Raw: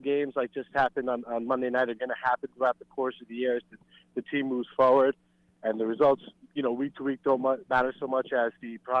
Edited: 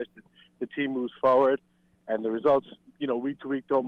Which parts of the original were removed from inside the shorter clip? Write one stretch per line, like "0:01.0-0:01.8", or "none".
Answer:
none